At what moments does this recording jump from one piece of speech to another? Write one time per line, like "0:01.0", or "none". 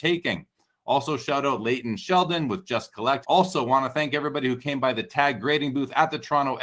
0:03.2